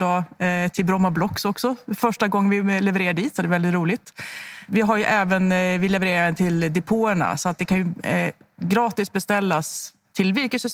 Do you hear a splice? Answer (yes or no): no